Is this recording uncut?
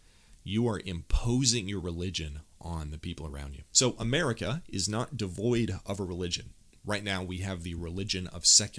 no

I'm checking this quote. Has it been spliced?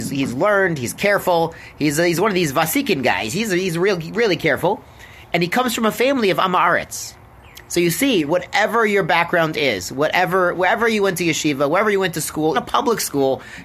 yes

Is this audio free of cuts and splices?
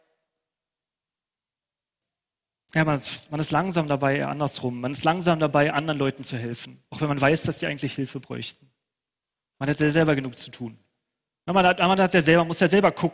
yes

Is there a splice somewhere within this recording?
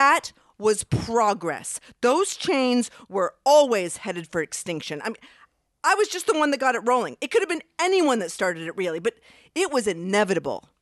no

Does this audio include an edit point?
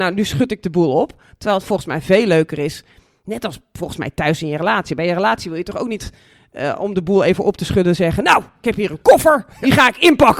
no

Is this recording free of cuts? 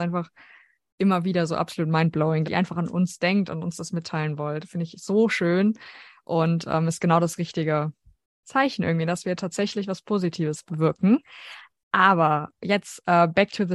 no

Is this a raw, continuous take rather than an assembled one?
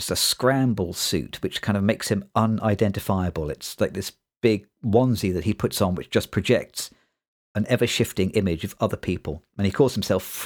yes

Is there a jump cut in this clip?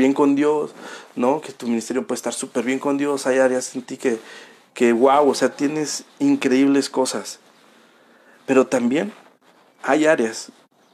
no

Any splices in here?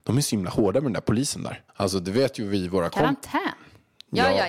yes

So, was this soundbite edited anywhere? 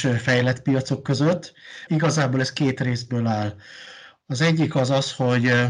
yes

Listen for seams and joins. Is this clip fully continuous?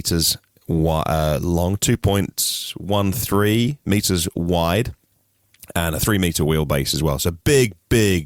yes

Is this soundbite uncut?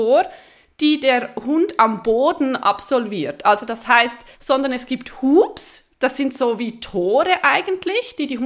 no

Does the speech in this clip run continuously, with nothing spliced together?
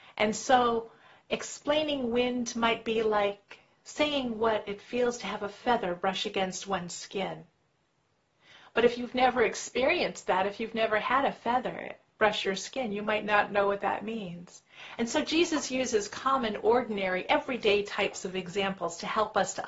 yes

